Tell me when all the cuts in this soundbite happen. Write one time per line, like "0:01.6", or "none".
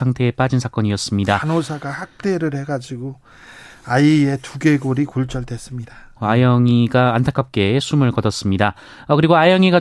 0:06.2